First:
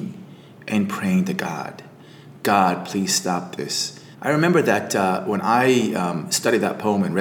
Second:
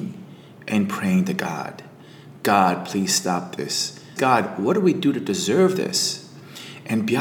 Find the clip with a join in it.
first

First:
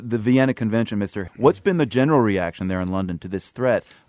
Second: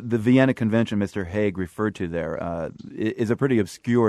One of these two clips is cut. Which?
first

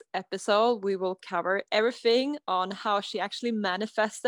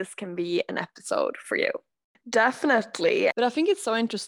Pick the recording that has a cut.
second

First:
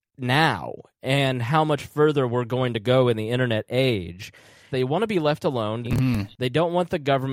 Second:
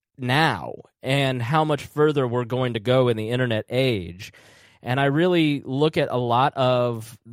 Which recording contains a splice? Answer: first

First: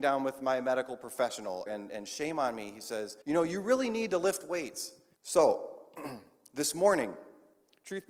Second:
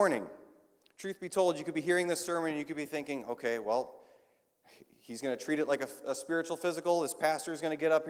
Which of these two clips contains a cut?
first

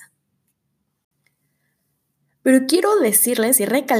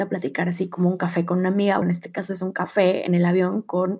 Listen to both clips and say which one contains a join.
second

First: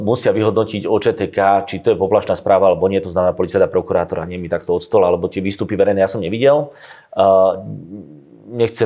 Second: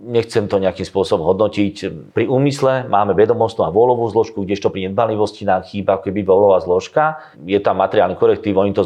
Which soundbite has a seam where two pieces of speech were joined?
second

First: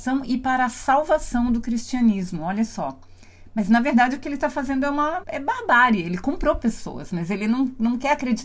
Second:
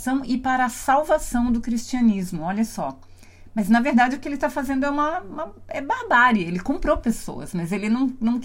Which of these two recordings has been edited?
first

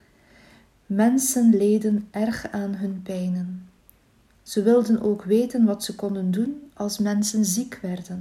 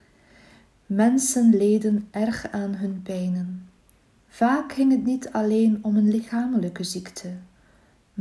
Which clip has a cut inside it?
second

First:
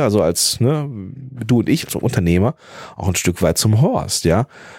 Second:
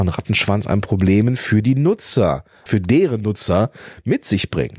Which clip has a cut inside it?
second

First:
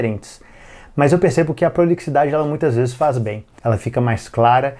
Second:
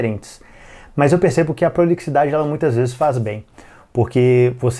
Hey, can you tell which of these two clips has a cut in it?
first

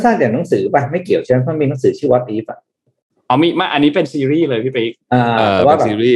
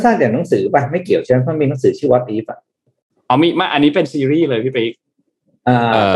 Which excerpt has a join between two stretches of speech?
first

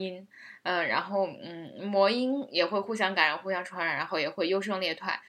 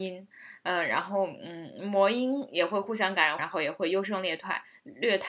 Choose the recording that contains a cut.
second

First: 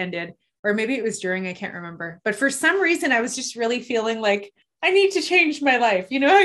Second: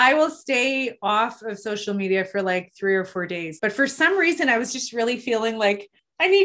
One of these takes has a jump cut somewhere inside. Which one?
second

